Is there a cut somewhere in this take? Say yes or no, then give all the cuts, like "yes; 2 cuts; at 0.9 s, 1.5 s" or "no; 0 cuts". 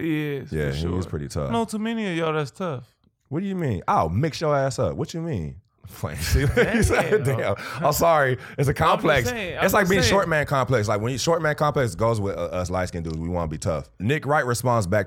yes; 1 cut; at 1.5 s